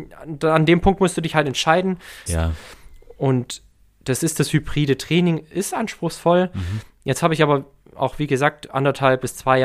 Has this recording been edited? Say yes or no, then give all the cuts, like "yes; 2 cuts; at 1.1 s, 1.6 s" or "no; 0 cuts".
yes; 1 cut; at 2.3 s